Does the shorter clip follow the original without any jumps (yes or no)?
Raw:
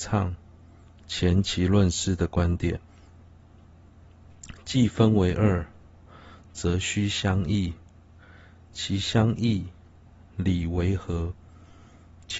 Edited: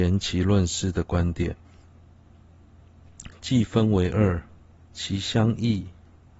no